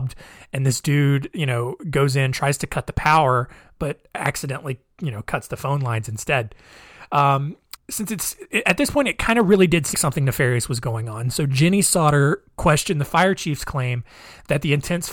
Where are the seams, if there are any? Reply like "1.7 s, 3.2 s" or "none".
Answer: 7.8 s, 9.9 s

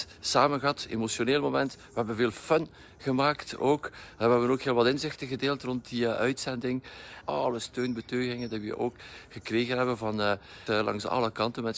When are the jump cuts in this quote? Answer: 7.2 s, 10.7 s

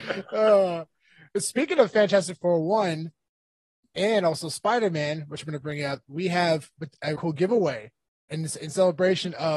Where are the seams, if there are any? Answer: 7.2 s

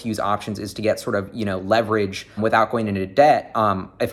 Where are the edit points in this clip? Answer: 2.4 s

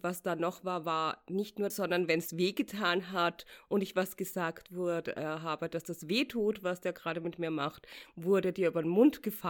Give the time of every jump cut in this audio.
1.7 s

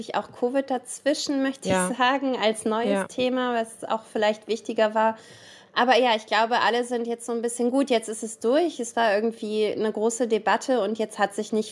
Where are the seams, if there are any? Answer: none

